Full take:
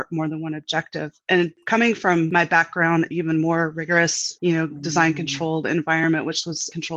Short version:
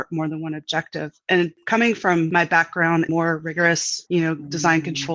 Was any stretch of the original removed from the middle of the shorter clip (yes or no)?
yes